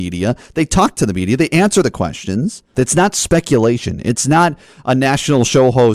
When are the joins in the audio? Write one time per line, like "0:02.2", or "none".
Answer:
0:02.7